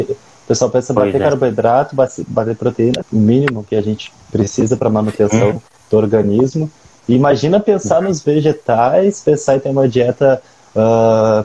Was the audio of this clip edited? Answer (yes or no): yes